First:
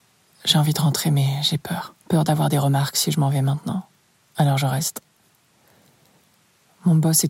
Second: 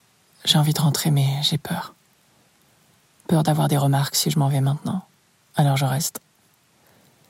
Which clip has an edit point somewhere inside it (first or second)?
first